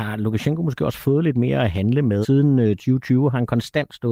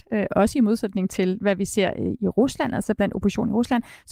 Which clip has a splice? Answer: first; 1 cut; at 2.2 s

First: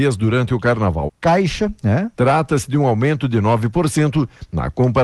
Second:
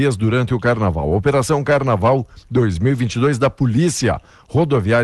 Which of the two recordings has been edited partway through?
first; 2 cuts; at 1.1 s, 2.1 s

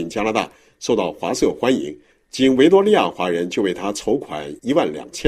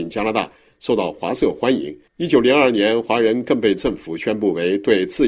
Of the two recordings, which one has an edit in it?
second; 1 cut; at 2.1 s

